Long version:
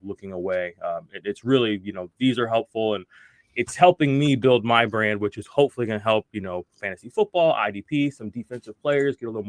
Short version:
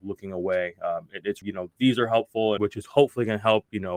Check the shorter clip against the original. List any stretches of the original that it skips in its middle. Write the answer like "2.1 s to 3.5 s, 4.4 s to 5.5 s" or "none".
1.4 s to 1.8 s, 3.0 s to 5.2 s